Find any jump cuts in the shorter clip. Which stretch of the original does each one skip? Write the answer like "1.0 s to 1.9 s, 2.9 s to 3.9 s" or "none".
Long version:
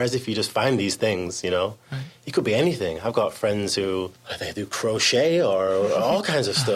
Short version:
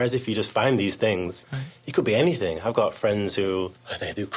1.4 s to 1.8 s